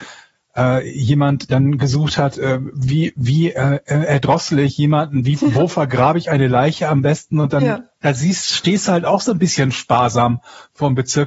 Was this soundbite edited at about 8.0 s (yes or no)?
no